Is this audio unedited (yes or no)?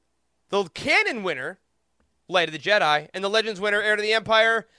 yes